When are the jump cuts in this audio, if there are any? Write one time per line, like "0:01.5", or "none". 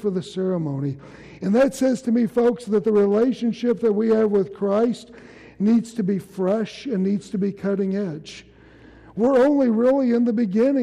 none